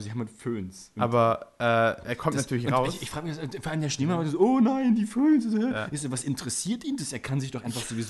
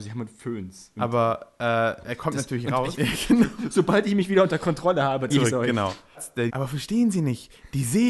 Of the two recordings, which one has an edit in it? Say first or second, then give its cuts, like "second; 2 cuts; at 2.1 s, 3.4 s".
second; 3 cuts; at 2.9 s, 5.3 s, 6.5 s